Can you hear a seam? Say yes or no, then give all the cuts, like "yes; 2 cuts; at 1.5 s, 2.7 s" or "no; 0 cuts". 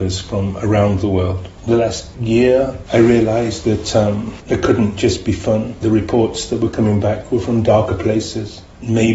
no; 0 cuts